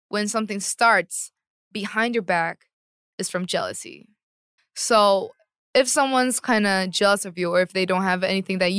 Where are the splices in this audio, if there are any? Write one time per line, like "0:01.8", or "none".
0:04.6